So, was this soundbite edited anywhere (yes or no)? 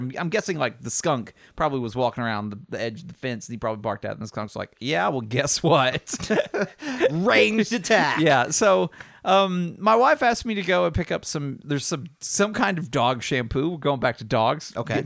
no